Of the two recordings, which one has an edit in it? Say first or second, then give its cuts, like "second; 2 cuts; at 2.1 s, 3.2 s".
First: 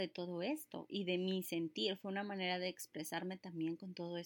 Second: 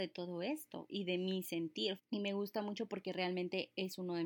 second; 1 cut; at 2.0 s